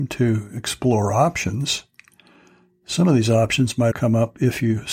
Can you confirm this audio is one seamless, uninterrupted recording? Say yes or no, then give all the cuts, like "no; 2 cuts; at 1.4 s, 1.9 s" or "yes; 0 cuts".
no; 1 cut; at 3.9 s